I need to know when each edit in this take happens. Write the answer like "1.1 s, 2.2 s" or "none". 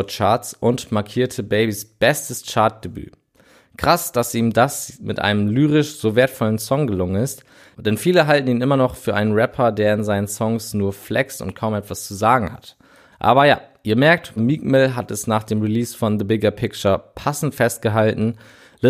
14.4 s